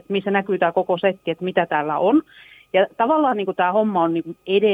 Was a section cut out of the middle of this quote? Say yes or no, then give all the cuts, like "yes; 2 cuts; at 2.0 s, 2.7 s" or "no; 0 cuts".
no; 0 cuts